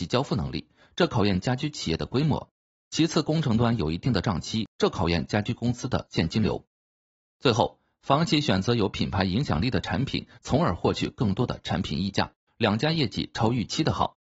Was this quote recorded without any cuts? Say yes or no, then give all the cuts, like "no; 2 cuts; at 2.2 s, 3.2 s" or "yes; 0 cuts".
no; 2 cuts; at 10.4 s, 12.5 s